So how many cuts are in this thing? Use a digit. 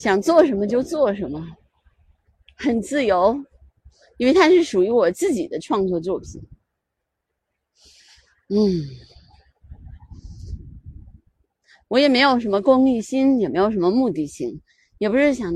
0